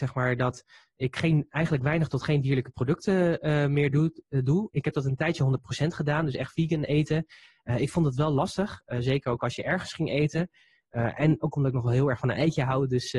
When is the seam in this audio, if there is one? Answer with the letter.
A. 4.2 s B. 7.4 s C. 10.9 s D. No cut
D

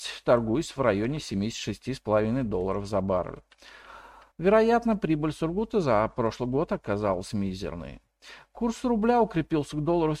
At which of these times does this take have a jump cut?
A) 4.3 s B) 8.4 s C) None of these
A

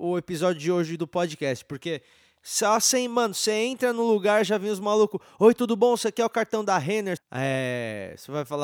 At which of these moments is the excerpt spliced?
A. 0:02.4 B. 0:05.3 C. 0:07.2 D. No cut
C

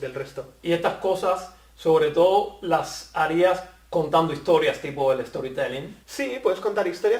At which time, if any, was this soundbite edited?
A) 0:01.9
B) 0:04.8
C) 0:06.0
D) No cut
C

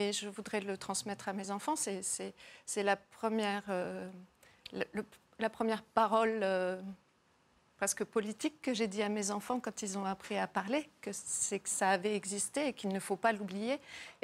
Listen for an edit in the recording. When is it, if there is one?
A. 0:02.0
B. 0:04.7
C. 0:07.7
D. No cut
D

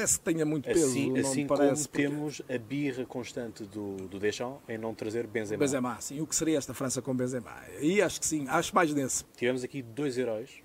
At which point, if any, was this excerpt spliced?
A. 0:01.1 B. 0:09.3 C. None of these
B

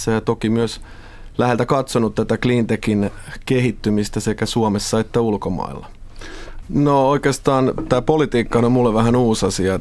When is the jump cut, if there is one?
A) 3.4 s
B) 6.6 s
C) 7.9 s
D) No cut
B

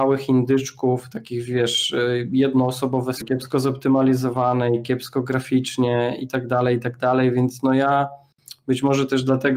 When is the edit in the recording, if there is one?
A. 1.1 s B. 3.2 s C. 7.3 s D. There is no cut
B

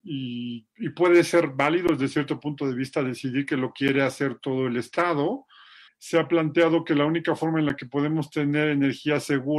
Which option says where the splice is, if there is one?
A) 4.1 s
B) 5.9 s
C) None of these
B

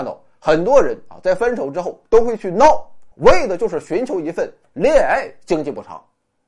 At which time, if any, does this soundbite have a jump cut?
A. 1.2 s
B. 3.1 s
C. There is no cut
B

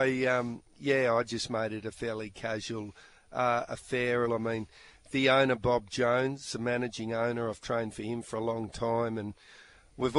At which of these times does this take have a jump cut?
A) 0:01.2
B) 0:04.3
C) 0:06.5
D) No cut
B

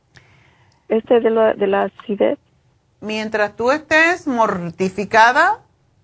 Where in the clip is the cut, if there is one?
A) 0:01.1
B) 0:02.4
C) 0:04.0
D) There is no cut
D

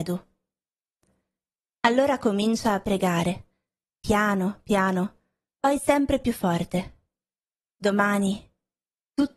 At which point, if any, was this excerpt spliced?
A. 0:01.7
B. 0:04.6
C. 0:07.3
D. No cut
D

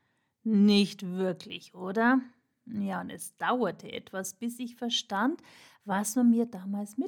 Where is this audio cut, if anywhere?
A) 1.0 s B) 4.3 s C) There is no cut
C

